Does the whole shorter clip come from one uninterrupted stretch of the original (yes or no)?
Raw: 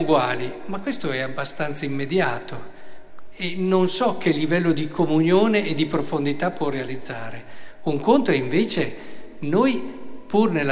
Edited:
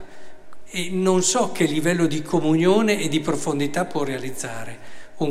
yes